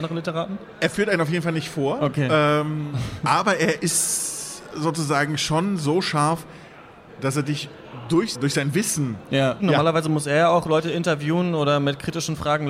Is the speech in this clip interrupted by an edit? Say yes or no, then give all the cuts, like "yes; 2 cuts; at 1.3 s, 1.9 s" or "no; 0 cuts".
yes; 2 cuts; at 8.3 s, 9.6 s